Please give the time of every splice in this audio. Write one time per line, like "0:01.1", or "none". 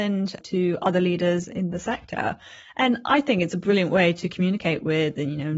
none

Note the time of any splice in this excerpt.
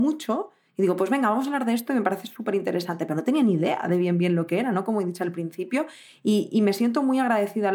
none

